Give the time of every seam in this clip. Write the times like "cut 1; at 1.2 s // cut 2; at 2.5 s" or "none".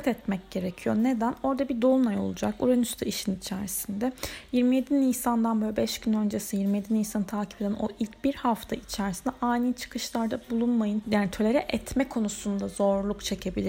cut 1; at 11.0 s